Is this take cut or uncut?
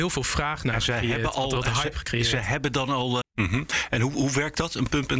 cut